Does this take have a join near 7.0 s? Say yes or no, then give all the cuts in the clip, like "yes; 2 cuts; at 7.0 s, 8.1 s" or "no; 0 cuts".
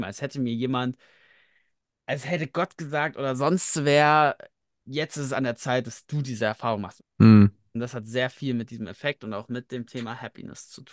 yes; 1 cut; at 7.0 s